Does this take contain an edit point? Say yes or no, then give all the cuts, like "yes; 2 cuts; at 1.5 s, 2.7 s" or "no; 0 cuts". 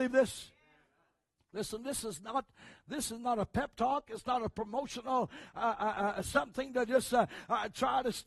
no; 0 cuts